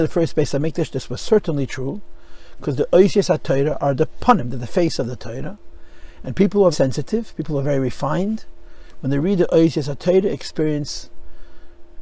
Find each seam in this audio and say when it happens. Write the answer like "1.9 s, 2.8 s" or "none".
6.7 s